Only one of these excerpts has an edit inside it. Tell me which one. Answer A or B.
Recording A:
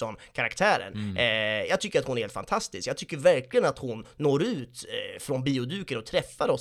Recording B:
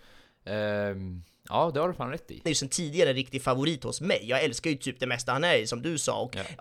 B